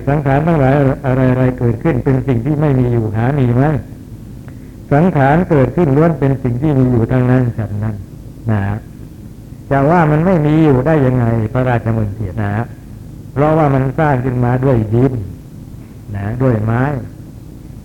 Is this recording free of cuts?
no; 1 cut; at 12.3 s

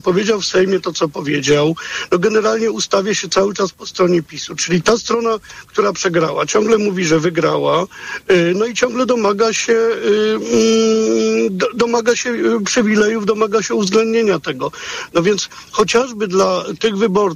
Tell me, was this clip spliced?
no; 0 cuts

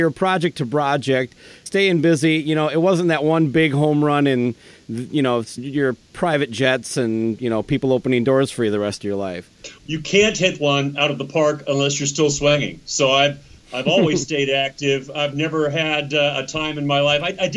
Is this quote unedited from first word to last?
no; 3 cuts; at 1.7 s, 5.6 s, 9.8 s

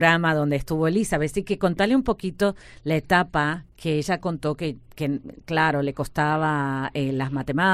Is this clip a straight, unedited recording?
yes; 0 cuts

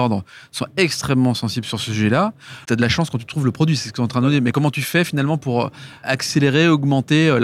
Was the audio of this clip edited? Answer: yes; 1 cut; at 2.6 s

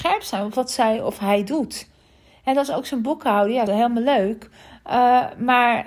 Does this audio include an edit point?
yes; 1 cut; at 3.7 s

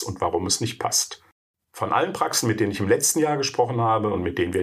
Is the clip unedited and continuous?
yes; 0 cuts

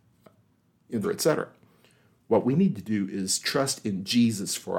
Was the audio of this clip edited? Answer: yes; 1 cut; at 1.0 s

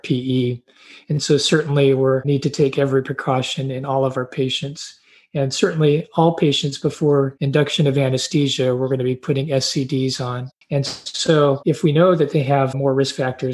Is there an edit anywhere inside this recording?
yes; 1 cut; at 10.6 s

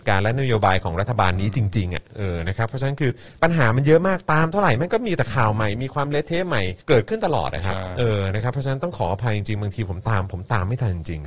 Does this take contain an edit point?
yes; 1 cut; at 6.8 s

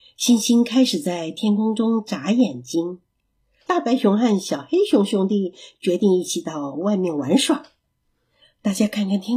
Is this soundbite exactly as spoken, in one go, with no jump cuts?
yes; 0 cuts

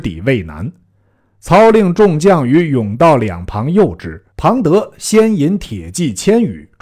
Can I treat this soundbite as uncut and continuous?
no; 1 cut; at 4.3 s

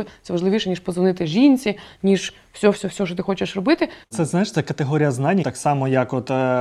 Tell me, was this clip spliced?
yes; 2 cuts; at 4.0 s, 5.4 s

